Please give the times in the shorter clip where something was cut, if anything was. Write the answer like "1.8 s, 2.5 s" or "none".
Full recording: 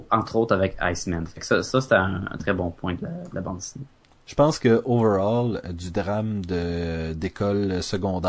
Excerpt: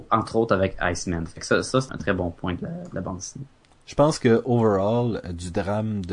1.9 s

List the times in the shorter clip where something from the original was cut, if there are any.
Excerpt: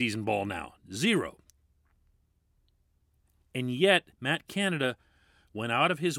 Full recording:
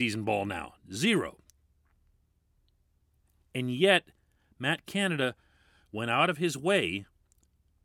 4.1 s

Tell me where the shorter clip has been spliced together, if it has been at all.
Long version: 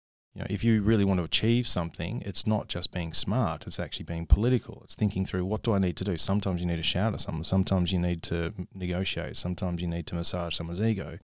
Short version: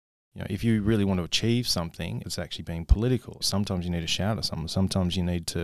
2.2 s, 3.4 s

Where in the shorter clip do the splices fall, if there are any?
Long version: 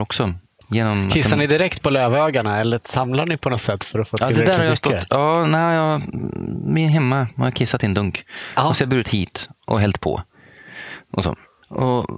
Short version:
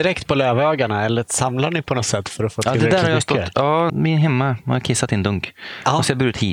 3.9 s

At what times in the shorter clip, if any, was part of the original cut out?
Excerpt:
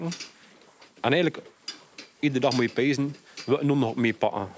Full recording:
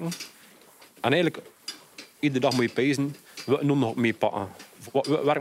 none

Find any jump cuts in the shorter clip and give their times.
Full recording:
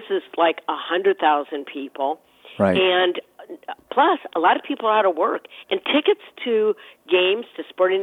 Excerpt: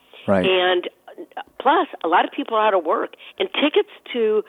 none

